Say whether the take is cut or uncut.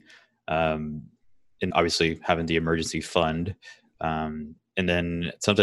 cut